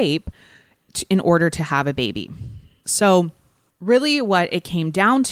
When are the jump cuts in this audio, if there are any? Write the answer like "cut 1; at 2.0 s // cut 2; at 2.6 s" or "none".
cut 1; at 2.8 s